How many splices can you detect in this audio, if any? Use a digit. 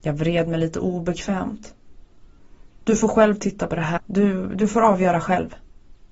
1